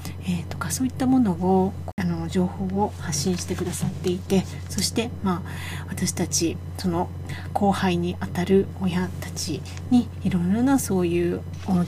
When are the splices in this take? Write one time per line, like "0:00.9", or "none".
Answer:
none